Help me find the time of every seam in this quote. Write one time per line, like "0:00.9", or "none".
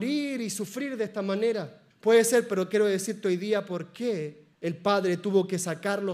0:01.9
0:04.5